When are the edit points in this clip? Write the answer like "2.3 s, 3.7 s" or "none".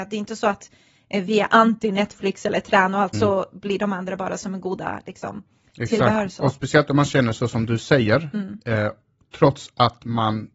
3.1 s

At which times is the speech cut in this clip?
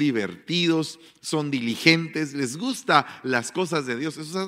none

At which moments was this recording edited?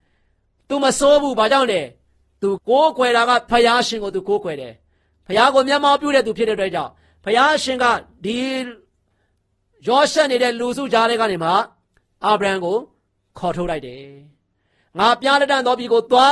2.6 s

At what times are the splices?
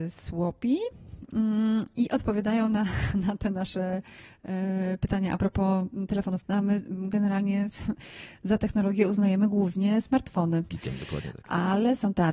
6.4 s, 10.7 s

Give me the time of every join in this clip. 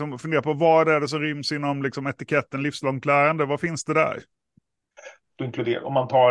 5.2 s

